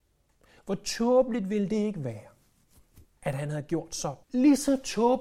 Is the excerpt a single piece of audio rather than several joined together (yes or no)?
no